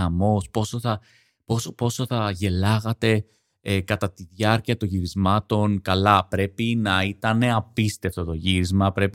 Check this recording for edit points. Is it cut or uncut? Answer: uncut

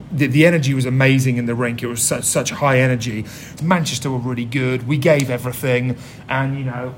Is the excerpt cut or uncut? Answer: cut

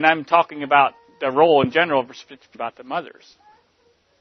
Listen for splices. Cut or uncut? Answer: cut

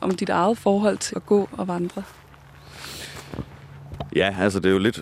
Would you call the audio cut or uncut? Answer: cut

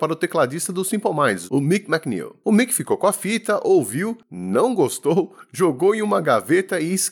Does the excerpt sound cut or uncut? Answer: uncut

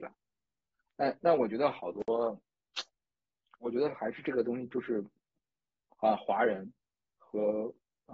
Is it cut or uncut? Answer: uncut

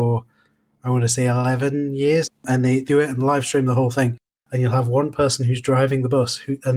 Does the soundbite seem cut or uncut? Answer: cut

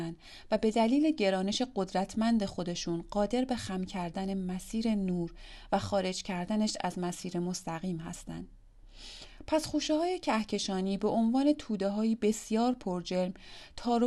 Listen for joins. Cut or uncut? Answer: uncut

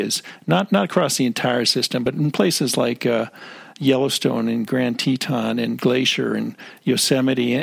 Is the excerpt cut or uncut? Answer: uncut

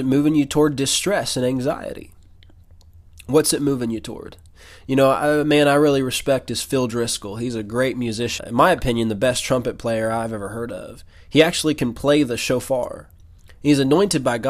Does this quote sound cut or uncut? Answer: cut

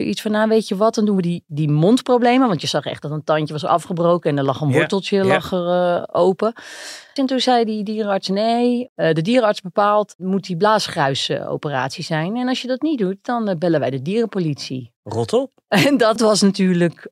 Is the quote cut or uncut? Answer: cut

